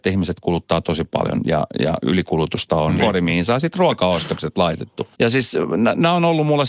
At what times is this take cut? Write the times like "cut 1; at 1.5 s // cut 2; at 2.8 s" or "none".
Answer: cut 1; at 3.0 s // cut 2; at 5.1 s